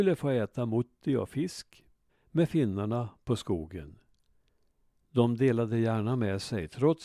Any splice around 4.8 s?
no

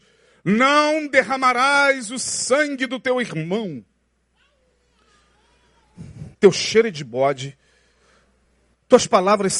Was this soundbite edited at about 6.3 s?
yes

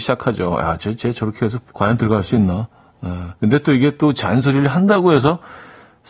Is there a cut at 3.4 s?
yes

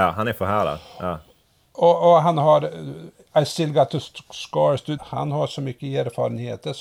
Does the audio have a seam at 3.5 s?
no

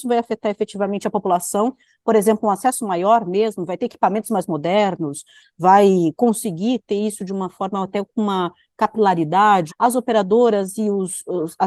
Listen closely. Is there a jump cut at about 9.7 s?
yes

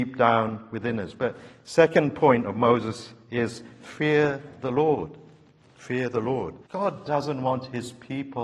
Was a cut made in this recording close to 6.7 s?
yes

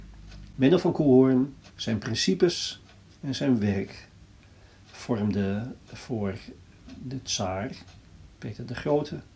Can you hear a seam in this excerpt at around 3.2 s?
no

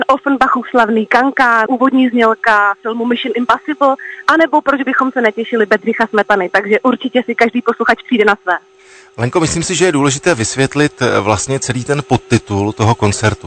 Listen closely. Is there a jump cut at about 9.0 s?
no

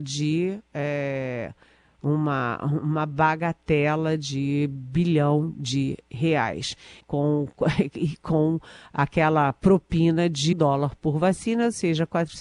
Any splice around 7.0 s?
yes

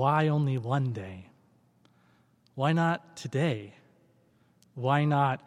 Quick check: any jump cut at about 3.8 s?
no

